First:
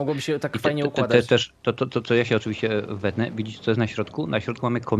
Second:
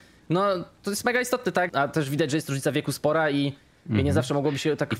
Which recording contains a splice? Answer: second; 1 cut; at 1.7 s

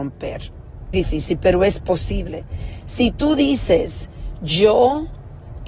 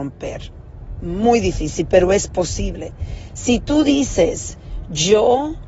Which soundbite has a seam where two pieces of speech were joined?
first; 1 cut; at 0.9 s

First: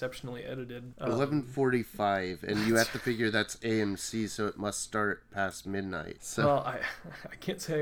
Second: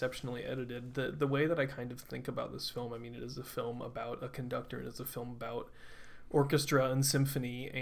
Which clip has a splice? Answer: first; 2 cuts; at 0.9 s, 6.2 s

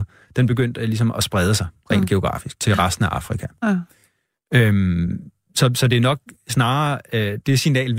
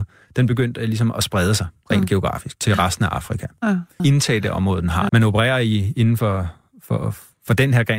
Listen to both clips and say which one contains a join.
second; 2 cuts; at 4.0 s, 5.1 s

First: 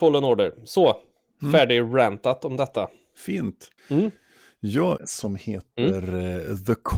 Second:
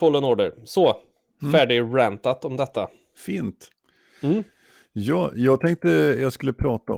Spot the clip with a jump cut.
first; 2 cuts; at 3.8 s, 5.0 s

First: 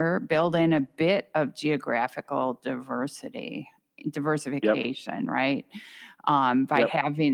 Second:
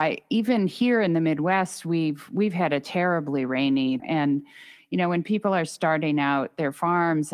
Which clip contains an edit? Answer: second; 1 cut; at 4.0 s

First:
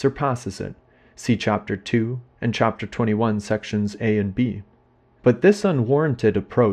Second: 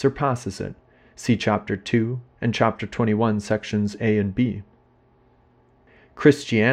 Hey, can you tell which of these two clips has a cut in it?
first; 1 cut; at 5.2 s

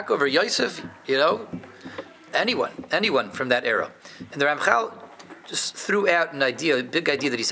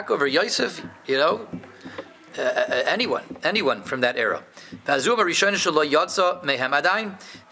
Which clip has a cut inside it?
first; 2 cuts; at 2.3 s, 4.3 s

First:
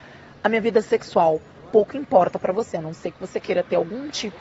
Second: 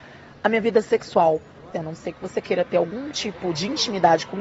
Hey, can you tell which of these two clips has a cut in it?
second; 1 cut; at 1.7 s

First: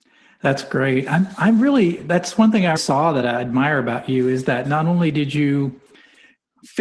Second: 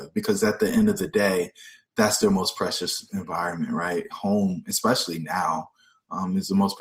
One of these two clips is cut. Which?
first; 1 cut; at 2.8 s

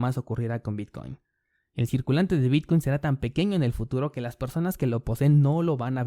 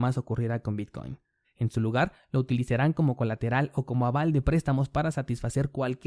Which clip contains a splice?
second; 1 cut; at 1.4 s

